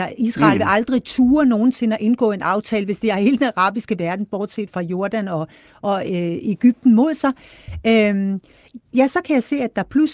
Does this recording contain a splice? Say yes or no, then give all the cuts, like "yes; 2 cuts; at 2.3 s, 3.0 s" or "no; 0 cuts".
yes; 1 cut; at 4.7 s